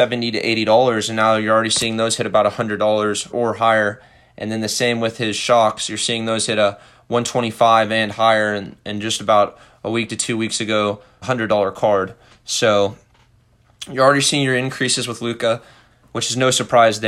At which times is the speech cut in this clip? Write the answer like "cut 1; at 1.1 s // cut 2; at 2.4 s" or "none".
cut 1; at 3.3 s // cut 2; at 11.2 s